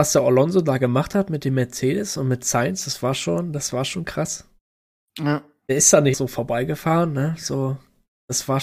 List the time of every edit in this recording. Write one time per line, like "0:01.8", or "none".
0:06.1